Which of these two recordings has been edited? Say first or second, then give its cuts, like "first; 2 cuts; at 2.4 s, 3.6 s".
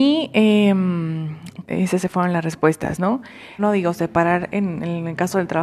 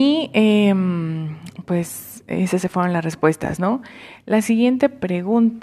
first; 2 cuts; at 1.6 s, 3.6 s